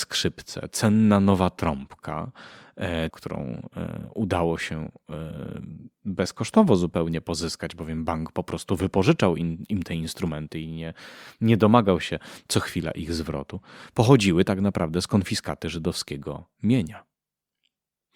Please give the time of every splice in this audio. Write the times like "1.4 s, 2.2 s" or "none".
3.1 s